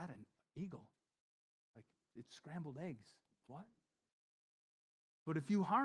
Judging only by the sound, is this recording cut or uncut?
cut